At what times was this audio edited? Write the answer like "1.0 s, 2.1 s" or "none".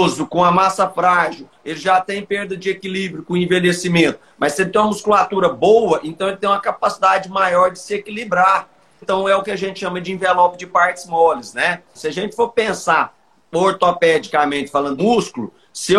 9.0 s, 11.9 s, 15.0 s